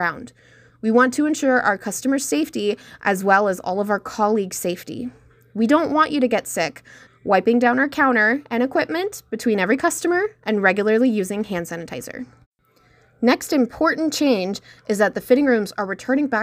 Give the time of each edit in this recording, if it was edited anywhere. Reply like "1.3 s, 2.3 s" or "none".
7.1 s